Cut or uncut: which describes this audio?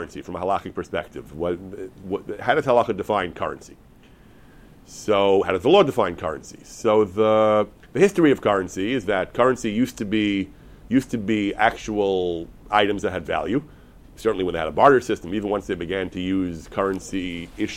uncut